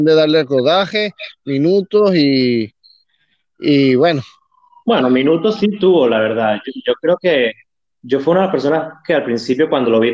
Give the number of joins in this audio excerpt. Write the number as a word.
zero